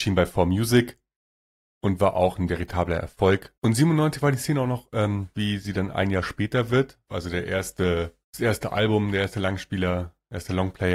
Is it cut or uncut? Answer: cut